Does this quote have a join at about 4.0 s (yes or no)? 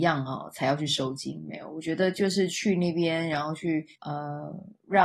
yes